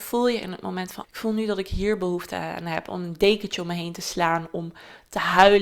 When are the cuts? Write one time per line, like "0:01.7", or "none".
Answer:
0:01.0